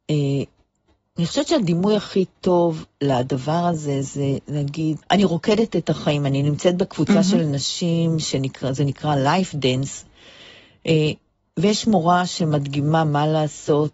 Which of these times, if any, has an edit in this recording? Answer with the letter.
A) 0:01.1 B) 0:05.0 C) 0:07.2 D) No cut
B